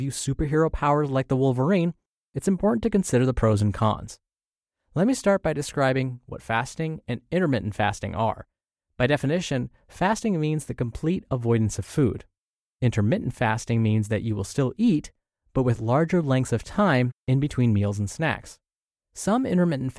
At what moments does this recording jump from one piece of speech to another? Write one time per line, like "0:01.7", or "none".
none